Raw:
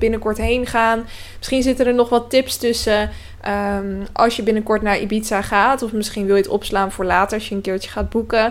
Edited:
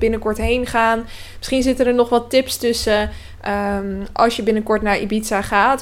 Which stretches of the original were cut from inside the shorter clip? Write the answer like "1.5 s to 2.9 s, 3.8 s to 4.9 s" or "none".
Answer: none